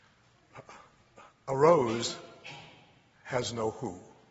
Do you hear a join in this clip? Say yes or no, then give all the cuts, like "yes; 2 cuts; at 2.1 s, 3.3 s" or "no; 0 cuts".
no; 0 cuts